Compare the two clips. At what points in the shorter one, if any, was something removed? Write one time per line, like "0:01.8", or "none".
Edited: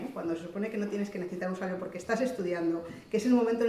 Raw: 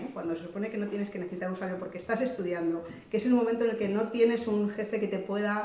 none

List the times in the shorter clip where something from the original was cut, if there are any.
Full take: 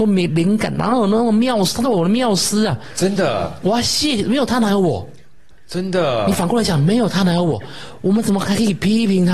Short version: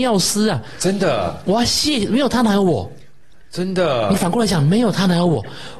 none

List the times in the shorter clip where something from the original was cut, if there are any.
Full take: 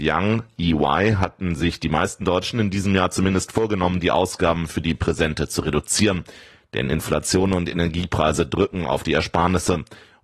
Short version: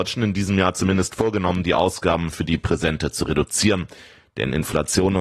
none

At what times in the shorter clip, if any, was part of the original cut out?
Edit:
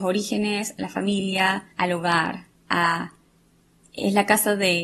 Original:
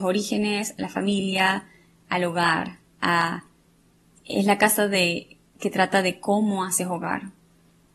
0:01.7

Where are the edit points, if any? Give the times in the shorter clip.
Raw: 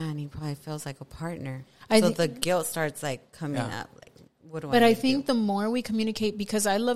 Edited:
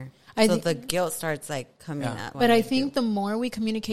0:02.3

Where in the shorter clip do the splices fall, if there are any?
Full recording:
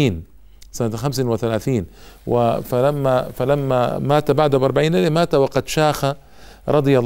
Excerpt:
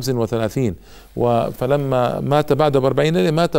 0:01.5

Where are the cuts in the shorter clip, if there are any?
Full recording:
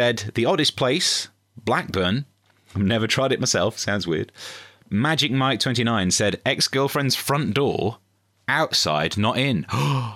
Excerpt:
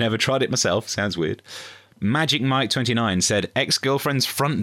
none

